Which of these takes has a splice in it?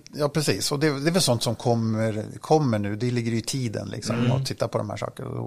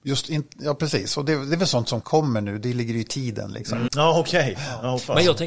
second; 2 cuts; at 2.0 s, 3.9 s

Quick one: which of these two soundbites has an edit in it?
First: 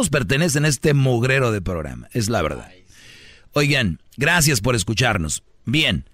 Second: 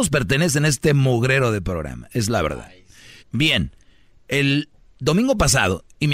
second; 1 cut; at 3.2 s

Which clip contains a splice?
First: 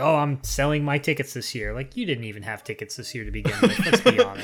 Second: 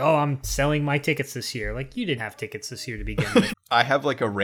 second; 2 cuts; at 2.2 s, 3.5 s

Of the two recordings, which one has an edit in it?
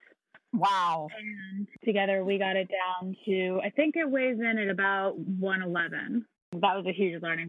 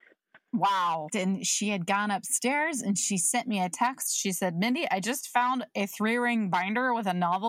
second; 1 cut; at 1.1 s

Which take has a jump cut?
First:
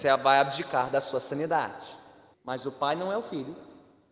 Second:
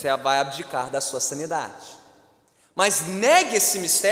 first; 1 cut; at 2.3 s

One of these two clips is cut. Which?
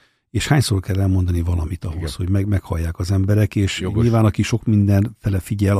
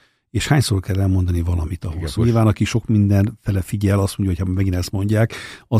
second; 1 cut; at 2.2 s

